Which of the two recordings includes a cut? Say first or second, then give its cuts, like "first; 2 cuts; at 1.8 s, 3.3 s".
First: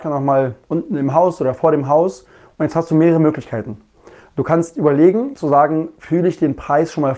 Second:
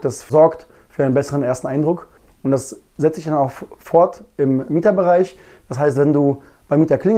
first; 1 cut; at 5.3 s